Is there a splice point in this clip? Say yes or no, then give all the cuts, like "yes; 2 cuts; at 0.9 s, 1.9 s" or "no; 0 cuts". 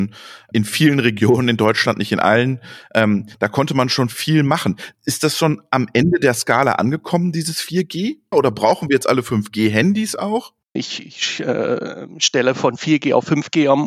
yes; 2 cuts; at 8.3 s, 10.8 s